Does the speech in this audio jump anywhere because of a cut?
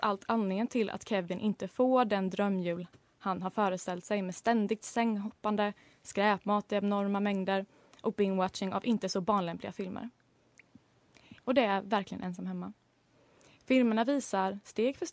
yes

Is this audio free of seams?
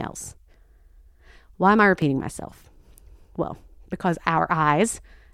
yes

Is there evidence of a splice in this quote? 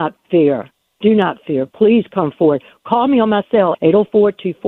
yes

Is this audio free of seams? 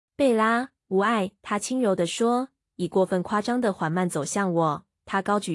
yes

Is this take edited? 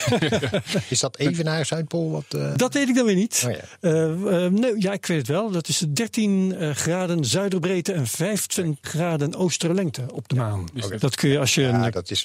yes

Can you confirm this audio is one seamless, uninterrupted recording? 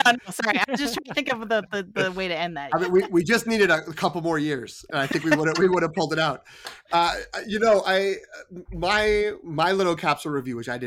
no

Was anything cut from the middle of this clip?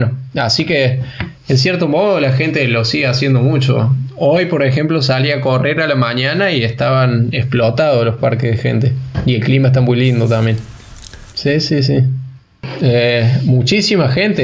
yes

